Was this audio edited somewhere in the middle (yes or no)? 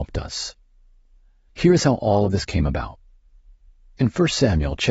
yes